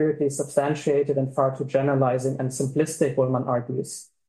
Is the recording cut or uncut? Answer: uncut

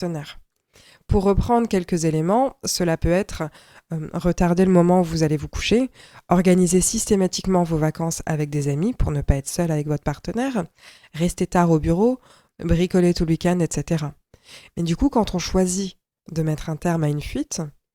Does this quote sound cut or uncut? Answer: cut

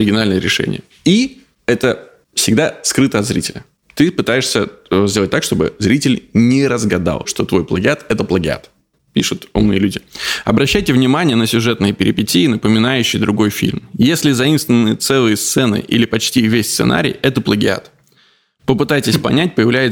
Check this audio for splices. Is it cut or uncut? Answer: cut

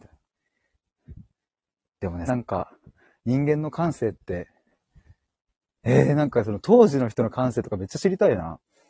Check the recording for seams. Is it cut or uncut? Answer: cut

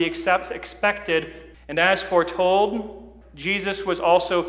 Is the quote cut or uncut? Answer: cut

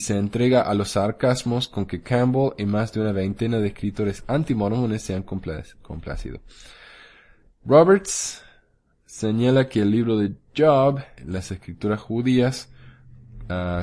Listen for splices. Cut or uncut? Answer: cut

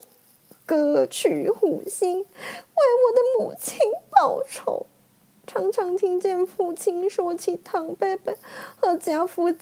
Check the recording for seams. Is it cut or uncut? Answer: uncut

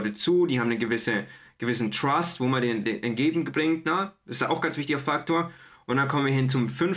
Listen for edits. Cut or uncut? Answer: uncut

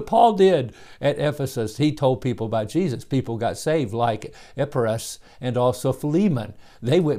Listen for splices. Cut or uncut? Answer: uncut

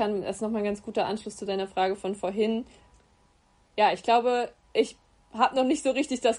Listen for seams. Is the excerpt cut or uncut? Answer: uncut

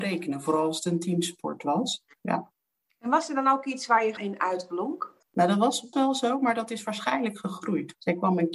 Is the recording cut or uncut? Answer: cut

